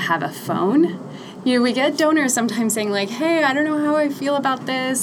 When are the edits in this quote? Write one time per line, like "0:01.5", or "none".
0:01.4